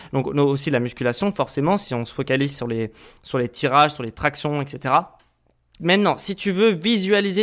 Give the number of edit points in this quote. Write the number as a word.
one